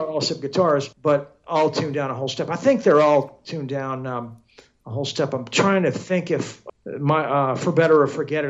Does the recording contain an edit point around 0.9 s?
yes; 1 cut; at 0.9 s

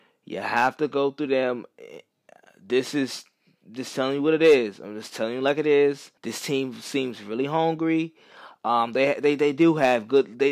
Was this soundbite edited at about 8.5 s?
no; 1 cut; at 6.2 s

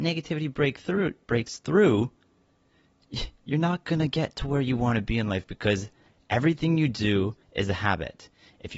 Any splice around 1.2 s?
no; 1 cut; at 7.4 s

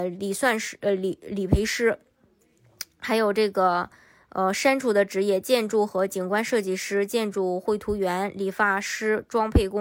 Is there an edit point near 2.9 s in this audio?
no; 0 cuts

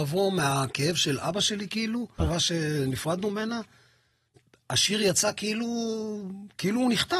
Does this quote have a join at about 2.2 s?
yes; 1 cut; at 2.2 s

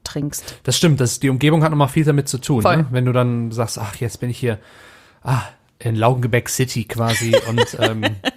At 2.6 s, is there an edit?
no; 0 cuts

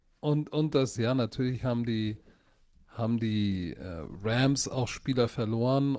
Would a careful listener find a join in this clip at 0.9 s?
yes; 1 cut; at 0.9 s

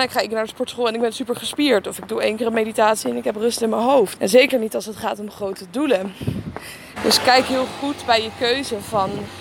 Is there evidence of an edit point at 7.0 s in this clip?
yes; 2 cuts; at 4.2 s, 7.0 s

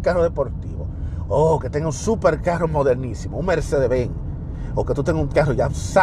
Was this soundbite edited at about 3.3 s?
no; 1 cut; at 1.3 s

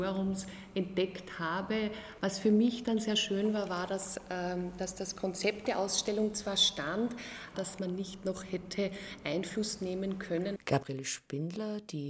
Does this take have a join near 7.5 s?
yes; 2 cuts; at 7.5 s, 10.6 s

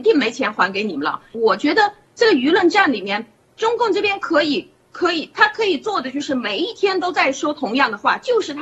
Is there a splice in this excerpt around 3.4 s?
no; 1 cut; at 1.3 s

